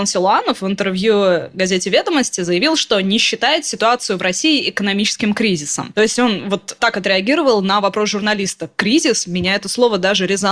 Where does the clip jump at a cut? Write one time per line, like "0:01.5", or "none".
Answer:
none